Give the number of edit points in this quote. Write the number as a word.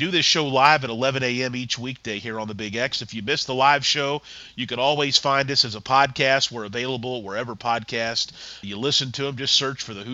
one